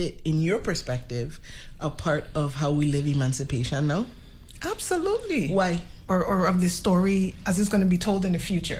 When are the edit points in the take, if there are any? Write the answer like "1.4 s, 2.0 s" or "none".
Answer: 6.1 s